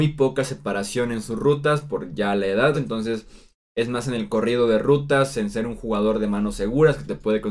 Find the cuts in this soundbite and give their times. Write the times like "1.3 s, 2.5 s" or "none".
2.7 s